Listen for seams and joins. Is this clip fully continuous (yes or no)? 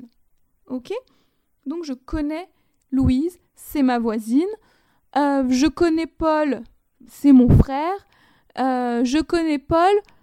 yes